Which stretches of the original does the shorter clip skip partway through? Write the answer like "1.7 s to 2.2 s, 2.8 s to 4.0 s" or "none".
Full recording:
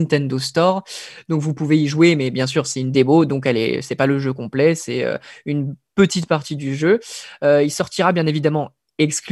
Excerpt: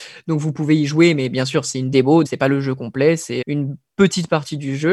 3.3 s to 3.8 s, 5.0 s to 5.4 s